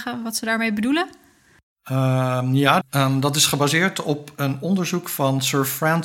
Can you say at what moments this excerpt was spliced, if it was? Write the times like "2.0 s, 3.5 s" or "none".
2.8 s

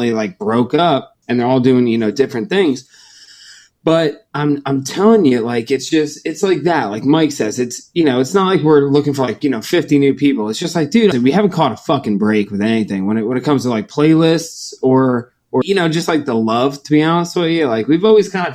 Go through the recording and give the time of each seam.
1.2 s, 11.1 s, 15.6 s

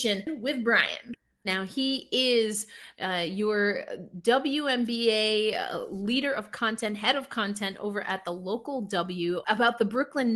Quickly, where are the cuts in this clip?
1.4 s, 9.4 s

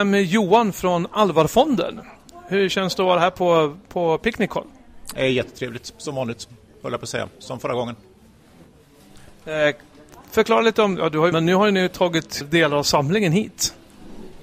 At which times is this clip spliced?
11.3 s, 12.4 s

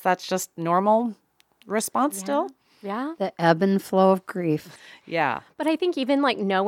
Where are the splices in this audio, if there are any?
4.8 s

